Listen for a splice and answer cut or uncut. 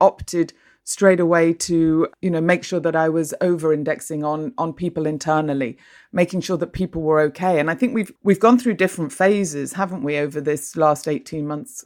cut